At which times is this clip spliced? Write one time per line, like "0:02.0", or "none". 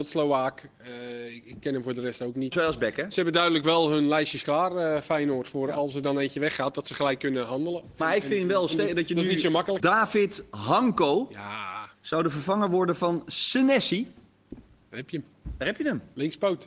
0:02.5
0:09.8